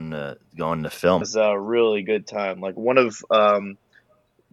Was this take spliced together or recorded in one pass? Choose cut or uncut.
cut